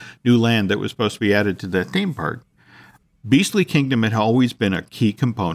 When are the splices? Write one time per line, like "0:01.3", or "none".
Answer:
none